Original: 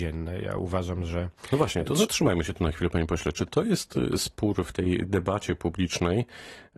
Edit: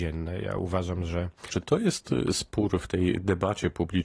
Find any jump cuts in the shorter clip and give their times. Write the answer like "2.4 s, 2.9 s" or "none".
1.5 s